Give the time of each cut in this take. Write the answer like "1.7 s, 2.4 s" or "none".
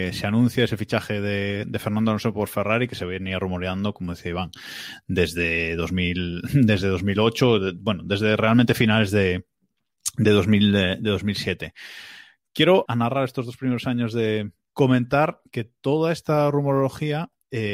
12.9 s, 14.7 s